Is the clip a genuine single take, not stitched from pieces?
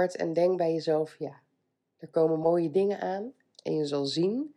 no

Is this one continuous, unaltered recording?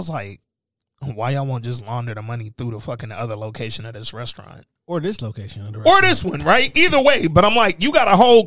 yes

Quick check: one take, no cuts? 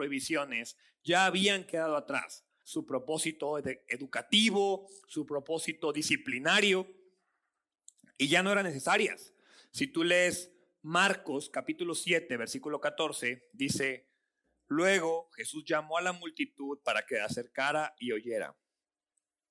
no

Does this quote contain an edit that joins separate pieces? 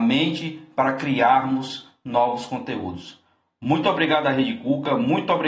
no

